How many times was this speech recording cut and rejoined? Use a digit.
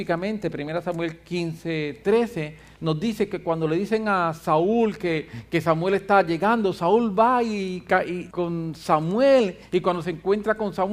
1